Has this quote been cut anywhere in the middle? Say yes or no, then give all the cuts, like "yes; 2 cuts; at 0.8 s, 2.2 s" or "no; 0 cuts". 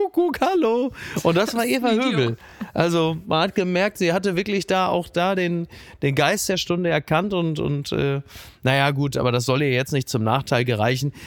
no; 0 cuts